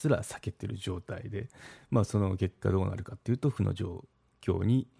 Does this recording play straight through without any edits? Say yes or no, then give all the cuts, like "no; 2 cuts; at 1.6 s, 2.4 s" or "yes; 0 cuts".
yes; 0 cuts